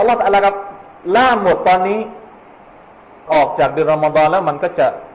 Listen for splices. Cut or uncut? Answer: cut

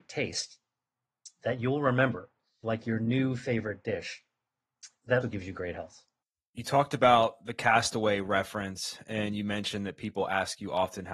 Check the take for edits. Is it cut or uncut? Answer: cut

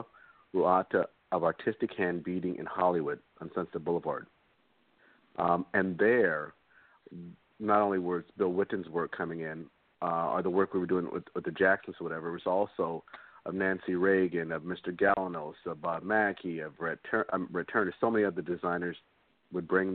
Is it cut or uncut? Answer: uncut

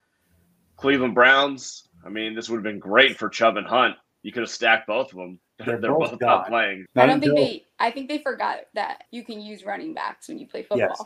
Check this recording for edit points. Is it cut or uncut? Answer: cut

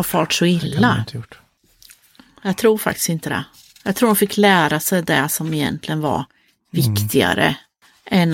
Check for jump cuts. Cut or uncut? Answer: uncut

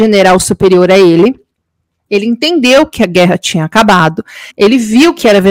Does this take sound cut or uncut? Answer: cut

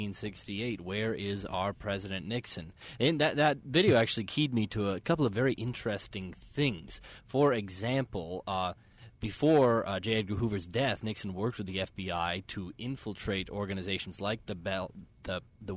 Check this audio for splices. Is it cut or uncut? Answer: uncut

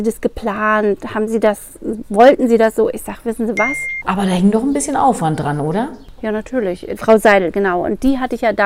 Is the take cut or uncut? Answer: cut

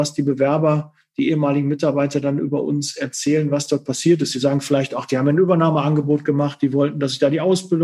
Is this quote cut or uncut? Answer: uncut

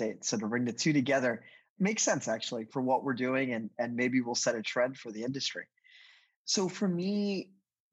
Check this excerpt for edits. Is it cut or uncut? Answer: uncut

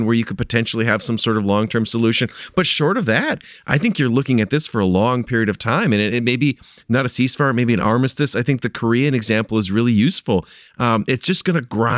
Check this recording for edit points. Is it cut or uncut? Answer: uncut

